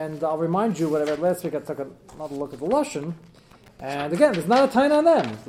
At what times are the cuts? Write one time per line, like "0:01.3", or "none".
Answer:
none